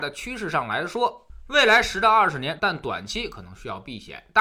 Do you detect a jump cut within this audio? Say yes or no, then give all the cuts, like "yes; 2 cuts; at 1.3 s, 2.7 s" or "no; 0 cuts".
yes; 1 cut; at 2.6 s